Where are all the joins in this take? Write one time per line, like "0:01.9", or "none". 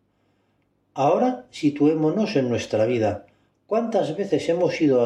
none